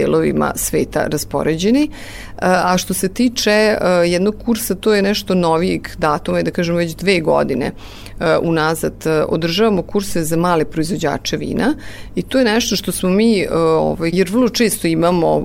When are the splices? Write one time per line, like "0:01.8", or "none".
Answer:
0:14.1